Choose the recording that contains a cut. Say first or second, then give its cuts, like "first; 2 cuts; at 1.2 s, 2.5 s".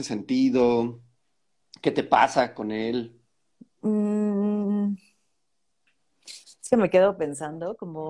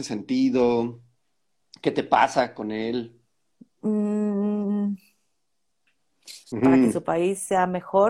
second; 1 cut; at 6.5 s